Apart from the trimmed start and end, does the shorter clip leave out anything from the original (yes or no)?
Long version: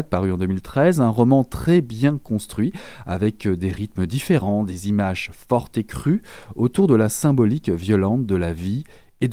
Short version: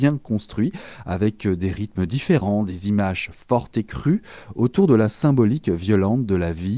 no